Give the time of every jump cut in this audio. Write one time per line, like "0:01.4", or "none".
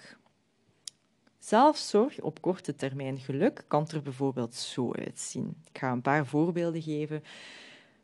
none